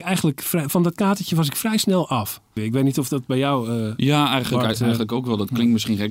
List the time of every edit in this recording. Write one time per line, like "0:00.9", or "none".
0:02.6